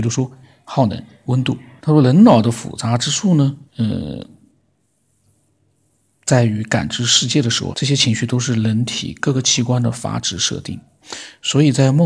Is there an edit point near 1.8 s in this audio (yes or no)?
yes